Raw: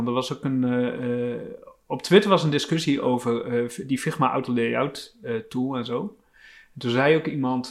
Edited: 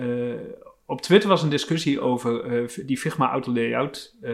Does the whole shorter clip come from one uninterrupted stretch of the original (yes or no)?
yes